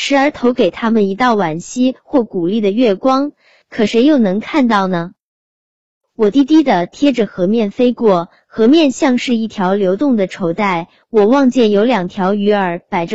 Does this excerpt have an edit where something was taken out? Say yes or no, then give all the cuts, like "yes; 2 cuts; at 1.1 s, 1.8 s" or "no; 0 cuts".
no; 0 cuts